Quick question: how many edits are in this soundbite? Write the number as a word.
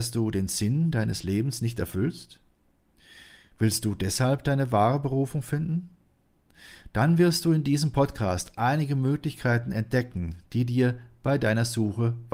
zero